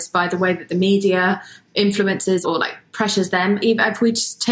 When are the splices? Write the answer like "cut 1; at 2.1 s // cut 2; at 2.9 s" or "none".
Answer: cut 1; at 2.4 s